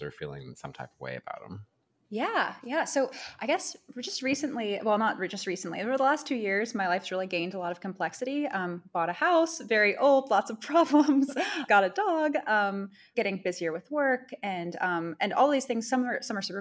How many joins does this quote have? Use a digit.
0